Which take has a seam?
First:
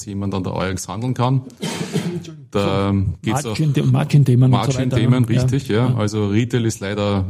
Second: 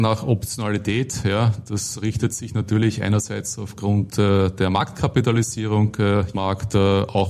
second; 1 cut; at 6.3 s

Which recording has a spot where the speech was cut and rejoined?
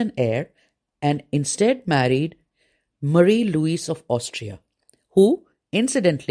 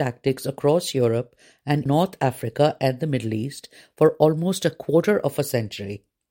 second; 1 cut; at 1.9 s

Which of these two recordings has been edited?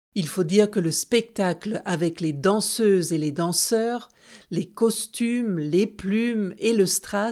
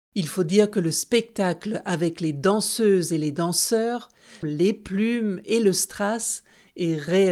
second; 1 cut; at 4.4 s

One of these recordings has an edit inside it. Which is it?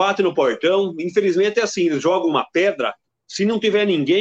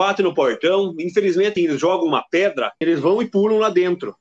second; 2 cuts; at 1.6 s, 2.8 s

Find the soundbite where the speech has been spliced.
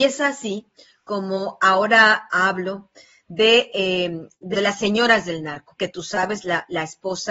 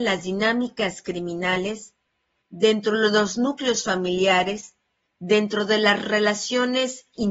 first; 2 cuts; at 4.5 s, 5.8 s

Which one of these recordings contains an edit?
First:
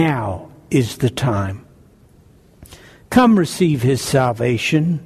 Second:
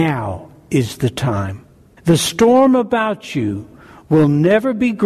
second; 1 cut; at 2.0 s

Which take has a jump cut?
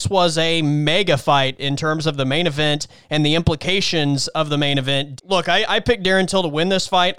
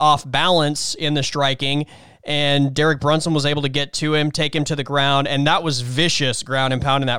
first; 1 cut; at 5.2 s

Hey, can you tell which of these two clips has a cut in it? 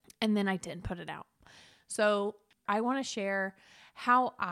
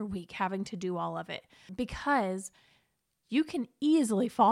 first; 1 cut; at 2.7 s

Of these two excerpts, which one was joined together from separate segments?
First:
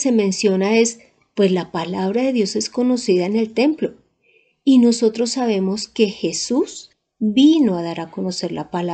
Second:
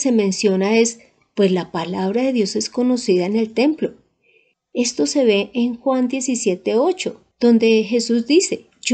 second; 2 cuts; at 4.5 s, 7.3 s

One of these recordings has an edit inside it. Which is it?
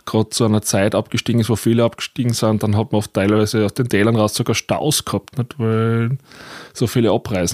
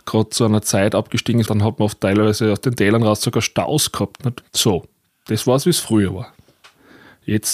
second; 2 cuts; at 1.5 s, 4.4 s

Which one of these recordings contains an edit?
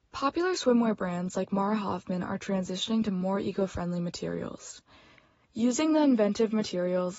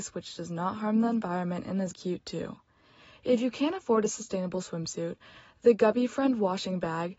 second; 1 cut; at 1.9 s

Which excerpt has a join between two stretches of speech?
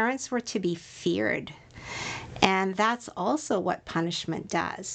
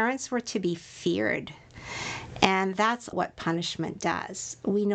second; 1 cut; at 3.1 s

